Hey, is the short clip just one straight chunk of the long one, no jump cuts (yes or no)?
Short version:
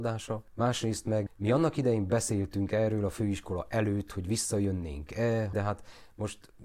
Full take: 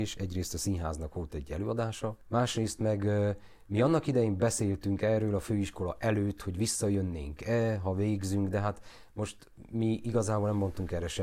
no